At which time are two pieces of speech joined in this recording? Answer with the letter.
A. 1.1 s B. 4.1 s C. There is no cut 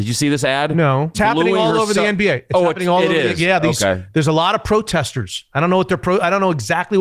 A